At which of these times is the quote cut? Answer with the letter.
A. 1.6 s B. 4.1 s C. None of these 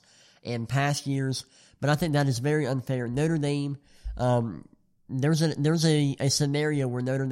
C